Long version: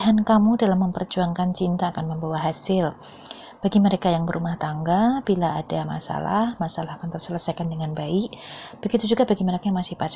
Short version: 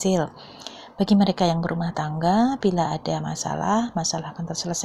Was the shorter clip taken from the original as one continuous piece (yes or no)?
yes